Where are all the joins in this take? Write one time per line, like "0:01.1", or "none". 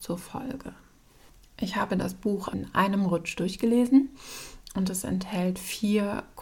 0:02.5